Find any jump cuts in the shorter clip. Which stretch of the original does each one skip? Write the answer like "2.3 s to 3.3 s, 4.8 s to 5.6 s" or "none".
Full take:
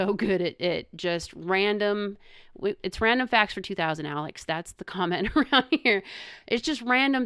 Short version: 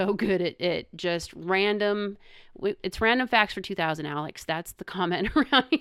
none